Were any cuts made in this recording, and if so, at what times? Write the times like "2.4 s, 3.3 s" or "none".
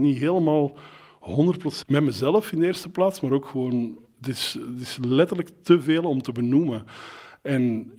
1.8 s